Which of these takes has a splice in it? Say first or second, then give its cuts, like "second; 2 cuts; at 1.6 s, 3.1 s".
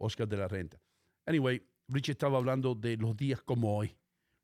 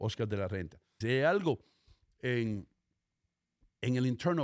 second; 1 cut; at 1.0 s